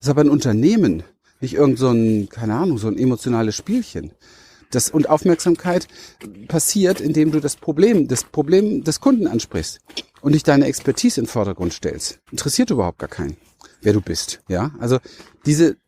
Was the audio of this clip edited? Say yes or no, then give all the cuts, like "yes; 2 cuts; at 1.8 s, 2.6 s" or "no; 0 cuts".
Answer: yes; 3 cuts; at 4.6 s, 12.3 s, 14.5 s